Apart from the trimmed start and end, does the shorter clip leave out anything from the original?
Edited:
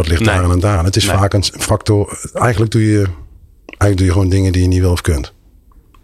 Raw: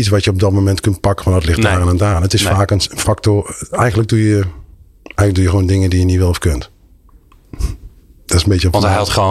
no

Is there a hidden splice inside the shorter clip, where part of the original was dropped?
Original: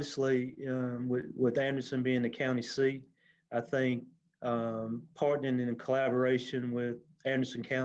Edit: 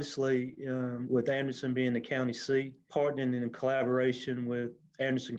yes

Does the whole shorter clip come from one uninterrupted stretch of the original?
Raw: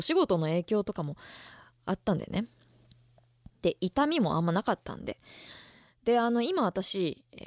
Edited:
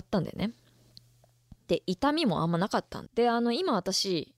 no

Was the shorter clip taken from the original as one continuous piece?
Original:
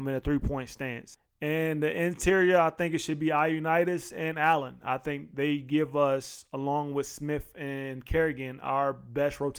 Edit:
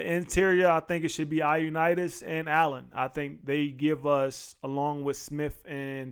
yes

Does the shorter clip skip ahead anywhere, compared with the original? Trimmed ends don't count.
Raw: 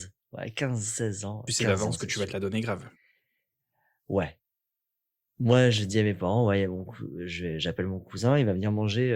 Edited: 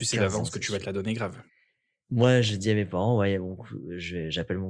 yes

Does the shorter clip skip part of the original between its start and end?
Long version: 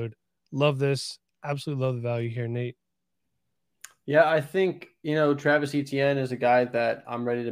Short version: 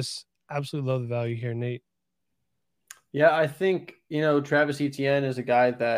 no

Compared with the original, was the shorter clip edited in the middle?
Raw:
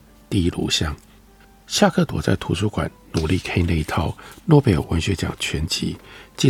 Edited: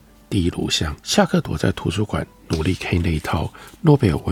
yes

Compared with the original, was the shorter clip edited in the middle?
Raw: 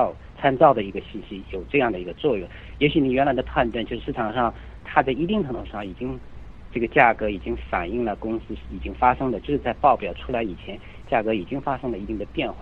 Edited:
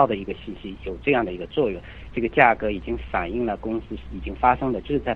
yes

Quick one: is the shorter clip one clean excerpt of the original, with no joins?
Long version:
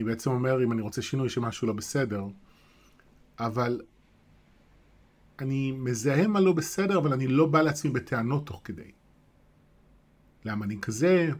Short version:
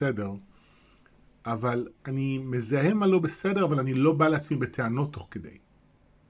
no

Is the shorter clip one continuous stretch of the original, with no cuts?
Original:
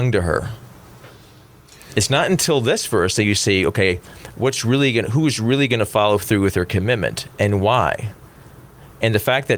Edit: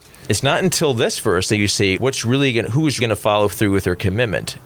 no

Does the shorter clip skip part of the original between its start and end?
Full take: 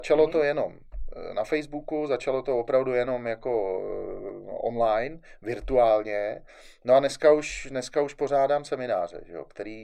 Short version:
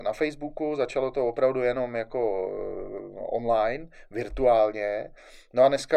no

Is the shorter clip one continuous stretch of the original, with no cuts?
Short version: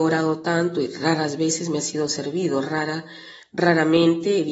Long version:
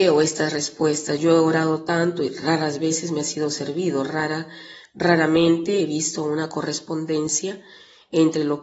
yes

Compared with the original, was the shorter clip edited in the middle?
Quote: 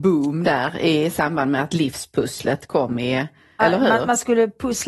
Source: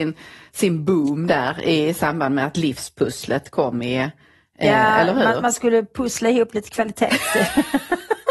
yes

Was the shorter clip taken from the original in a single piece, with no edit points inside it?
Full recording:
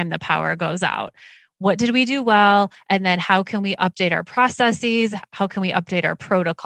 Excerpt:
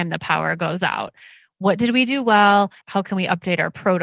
no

